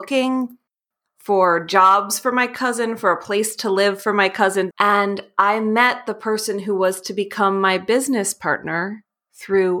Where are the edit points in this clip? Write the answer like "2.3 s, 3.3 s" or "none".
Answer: 4.7 s